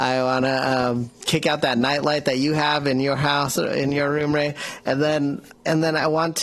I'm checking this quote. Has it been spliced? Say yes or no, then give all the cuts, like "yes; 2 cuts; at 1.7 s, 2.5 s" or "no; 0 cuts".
no; 0 cuts